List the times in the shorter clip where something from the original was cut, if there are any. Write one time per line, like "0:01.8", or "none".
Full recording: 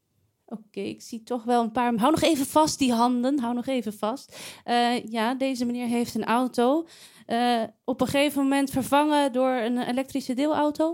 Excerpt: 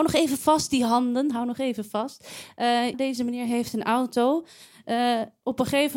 0:02.9